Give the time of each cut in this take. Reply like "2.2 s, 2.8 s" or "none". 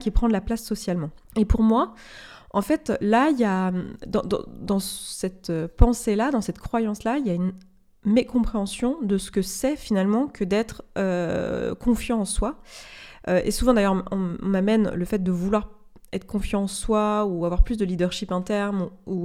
1.3 s